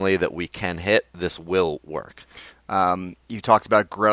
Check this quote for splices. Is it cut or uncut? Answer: cut